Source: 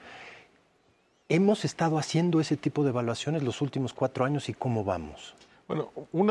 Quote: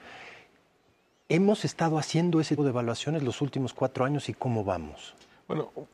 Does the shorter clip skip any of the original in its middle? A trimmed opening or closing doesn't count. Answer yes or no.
yes